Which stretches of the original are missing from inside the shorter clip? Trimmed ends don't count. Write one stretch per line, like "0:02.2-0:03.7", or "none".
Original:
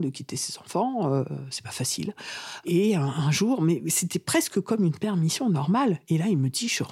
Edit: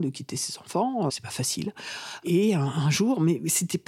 0:01.1-0:01.5